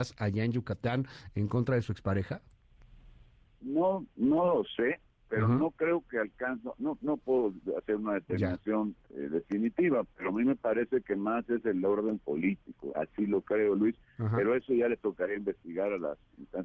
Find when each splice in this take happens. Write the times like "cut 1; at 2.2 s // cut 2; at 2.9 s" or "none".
none

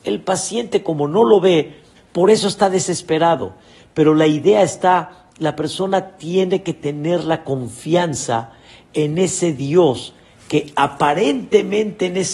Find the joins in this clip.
cut 1; at 2.0 s

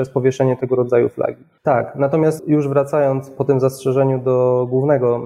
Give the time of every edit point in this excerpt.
cut 1; at 1.6 s

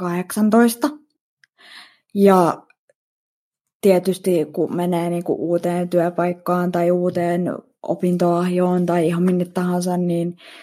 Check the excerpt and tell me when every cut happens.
none

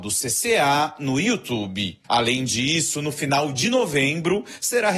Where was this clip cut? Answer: cut 1; at 2.0 s

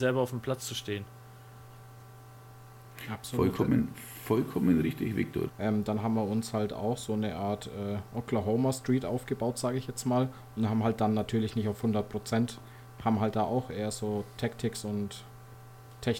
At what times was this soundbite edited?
cut 1; at 5.5 s

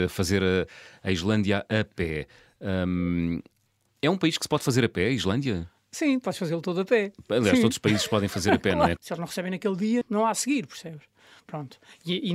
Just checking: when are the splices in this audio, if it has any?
cut 1; at 9.0 s // cut 2; at 10.0 s

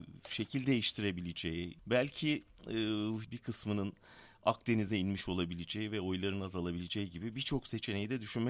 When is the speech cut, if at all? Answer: cut 1; at 1.8 s // cut 2; at 3.2 s

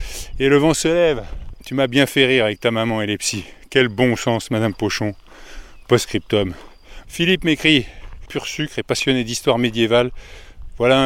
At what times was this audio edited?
cut 1; at 1.6 s // cut 2; at 7.0 s // cut 3; at 8.3 s

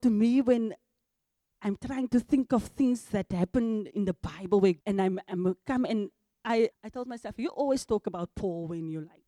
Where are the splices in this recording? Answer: cut 1; at 4.8 s // cut 2; at 6.7 s

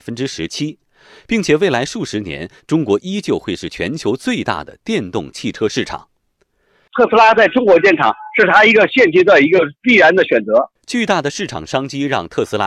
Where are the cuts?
cut 1; at 6.9 s

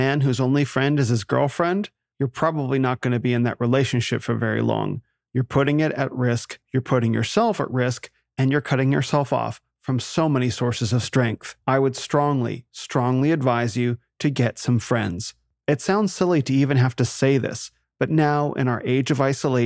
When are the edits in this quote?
cut 1; at 17.8 s

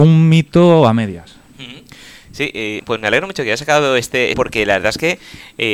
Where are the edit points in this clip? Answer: cut 1; at 2.8 s // cut 2; at 4.3 s

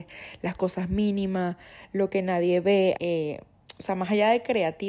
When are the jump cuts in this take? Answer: cut 1; at 3.0 s

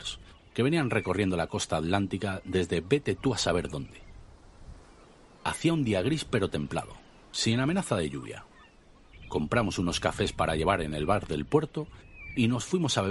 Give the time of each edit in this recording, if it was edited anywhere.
none

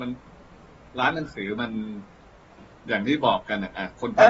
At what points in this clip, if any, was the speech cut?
none

